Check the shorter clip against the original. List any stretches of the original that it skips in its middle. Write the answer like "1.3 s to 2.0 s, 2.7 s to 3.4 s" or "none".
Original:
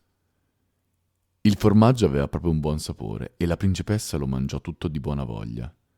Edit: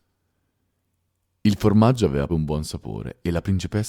2.3 s to 2.4 s